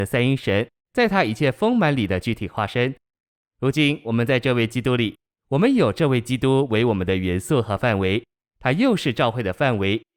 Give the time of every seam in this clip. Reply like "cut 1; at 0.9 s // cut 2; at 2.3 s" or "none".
none